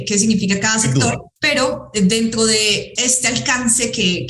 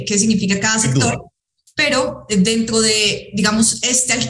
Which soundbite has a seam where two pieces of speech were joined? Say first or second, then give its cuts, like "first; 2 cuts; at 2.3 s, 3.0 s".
first; 2 cuts; at 1.4 s, 3.0 s